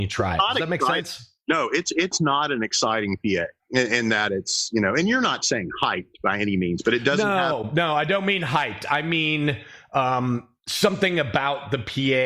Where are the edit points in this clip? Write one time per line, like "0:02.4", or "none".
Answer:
0:03.6